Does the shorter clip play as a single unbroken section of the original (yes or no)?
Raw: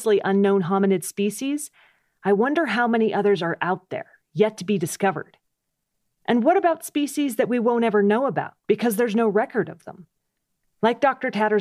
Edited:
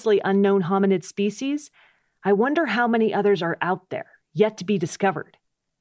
yes